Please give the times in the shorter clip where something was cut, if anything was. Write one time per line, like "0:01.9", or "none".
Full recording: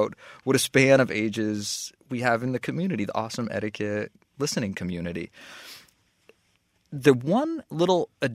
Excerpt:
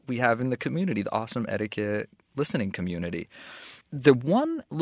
0:03.8